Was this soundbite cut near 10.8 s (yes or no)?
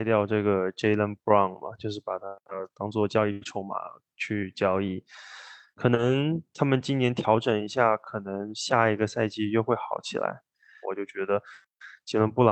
yes